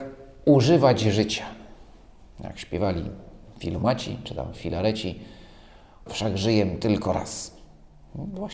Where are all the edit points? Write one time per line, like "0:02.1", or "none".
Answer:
0:06.1